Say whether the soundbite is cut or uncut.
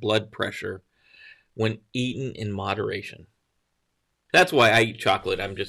cut